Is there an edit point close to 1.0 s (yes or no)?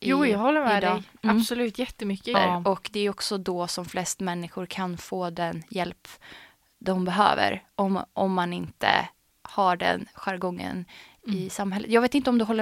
no